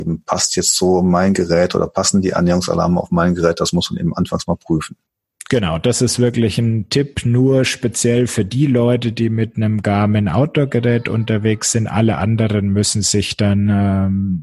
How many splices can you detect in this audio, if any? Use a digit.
0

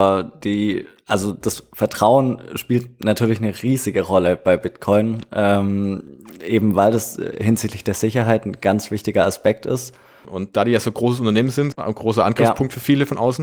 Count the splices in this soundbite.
2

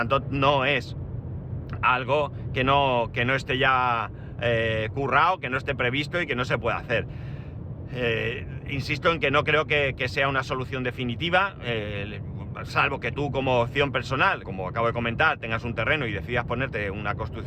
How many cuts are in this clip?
1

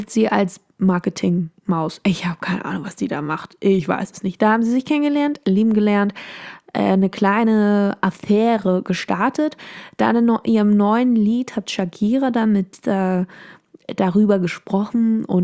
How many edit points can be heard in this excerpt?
0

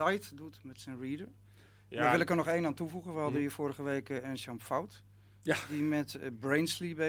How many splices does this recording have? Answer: 0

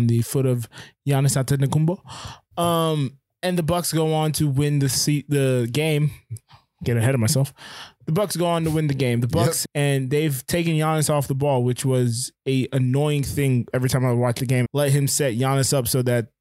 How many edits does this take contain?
2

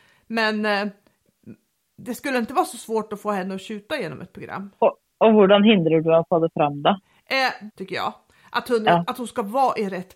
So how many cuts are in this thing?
2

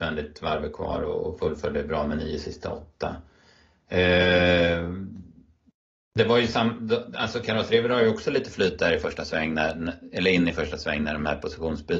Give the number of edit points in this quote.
0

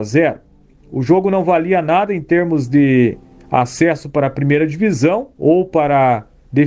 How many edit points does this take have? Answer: 1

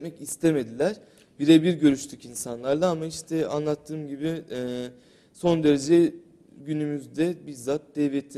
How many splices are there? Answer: 0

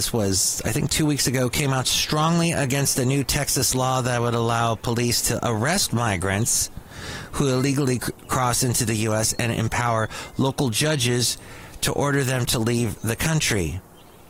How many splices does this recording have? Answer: 0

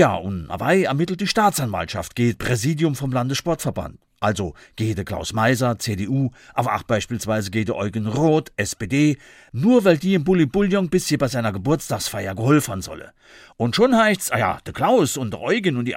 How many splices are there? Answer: 0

